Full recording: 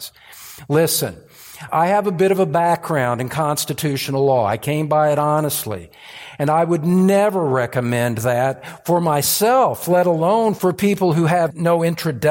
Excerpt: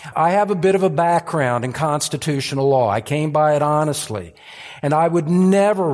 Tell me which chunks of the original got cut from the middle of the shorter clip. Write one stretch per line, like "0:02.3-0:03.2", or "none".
none

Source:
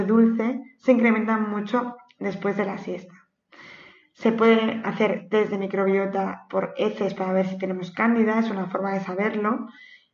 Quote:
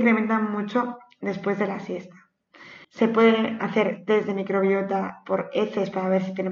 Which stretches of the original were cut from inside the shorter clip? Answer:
0:03.8-0:04.1

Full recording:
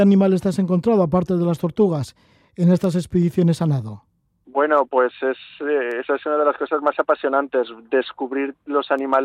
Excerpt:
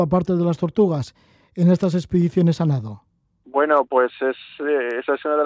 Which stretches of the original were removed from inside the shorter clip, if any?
none

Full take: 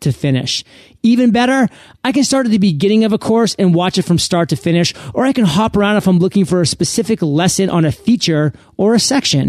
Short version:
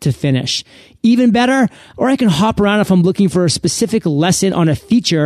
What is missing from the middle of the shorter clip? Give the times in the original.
0:02.0-0:05.1

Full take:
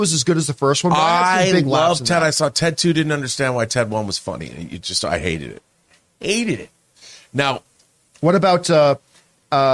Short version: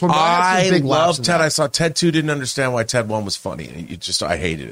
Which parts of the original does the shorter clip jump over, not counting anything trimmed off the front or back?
none

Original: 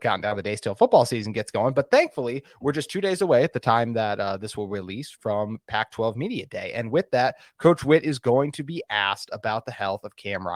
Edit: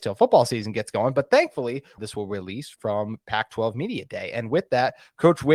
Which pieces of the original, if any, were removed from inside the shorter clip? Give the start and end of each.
0:02.6-0:04.4

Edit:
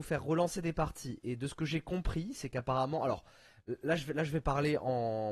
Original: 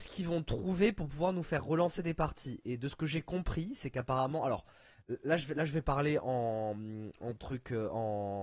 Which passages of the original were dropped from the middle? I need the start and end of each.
none

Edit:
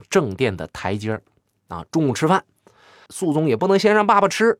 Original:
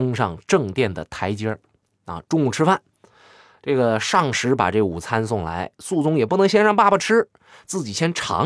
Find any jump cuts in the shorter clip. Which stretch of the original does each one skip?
0:03.4-0:05.8

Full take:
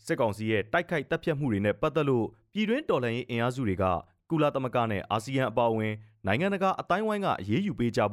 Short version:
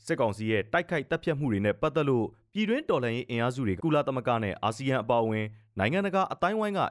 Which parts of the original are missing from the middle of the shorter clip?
0:03.8-0:04.2

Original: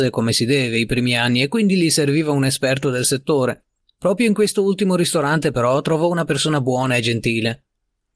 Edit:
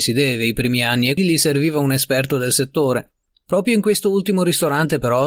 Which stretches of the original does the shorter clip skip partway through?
0:01.5-0:01.7

